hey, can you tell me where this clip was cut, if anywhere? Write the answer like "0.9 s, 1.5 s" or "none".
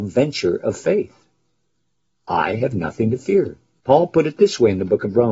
2.1 s, 3.8 s

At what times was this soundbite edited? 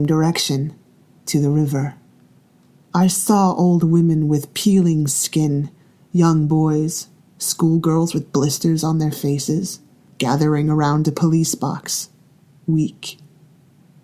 7.2 s

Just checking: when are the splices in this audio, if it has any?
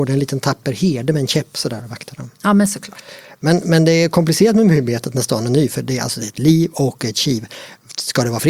none

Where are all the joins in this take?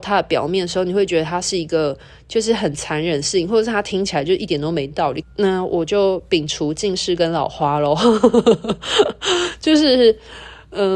5.2 s

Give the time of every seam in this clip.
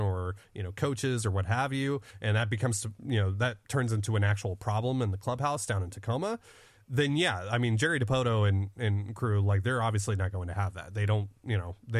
none

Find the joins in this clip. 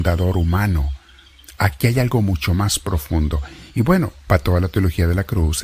none

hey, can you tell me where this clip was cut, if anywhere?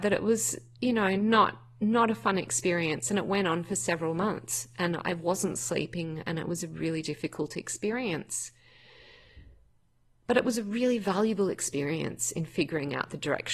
none

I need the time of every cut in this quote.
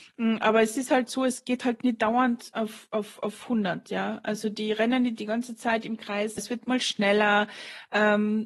6.4 s

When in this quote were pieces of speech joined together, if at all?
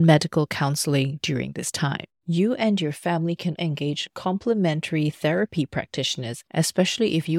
2.1 s, 3.6 s

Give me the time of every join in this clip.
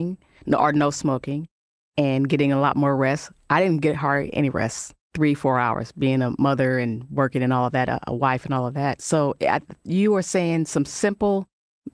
5.0 s

